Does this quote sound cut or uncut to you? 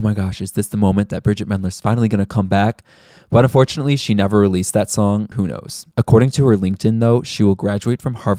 cut